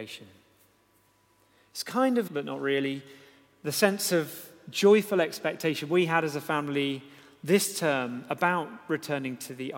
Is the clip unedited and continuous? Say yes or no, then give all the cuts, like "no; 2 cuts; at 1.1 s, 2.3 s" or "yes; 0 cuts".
no; 1 cut; at 2.3 s